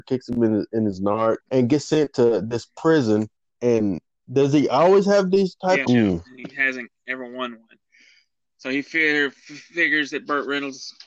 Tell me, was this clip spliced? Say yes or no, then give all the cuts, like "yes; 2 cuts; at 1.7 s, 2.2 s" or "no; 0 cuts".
yes; 3 cuts; at 1.4 s, 3.5 s, 5.9 s